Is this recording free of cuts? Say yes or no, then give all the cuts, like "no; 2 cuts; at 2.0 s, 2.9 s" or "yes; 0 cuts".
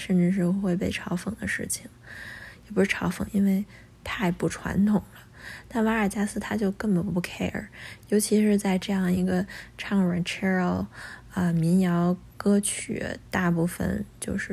no; 1 cut; at 3.3 s